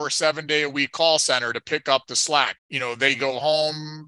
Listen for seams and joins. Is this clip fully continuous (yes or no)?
no